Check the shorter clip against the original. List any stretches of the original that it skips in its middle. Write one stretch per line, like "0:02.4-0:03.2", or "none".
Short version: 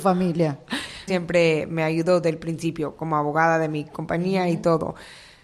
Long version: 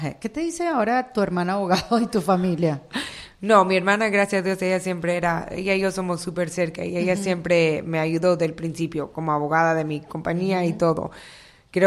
0:03.3-0:07.2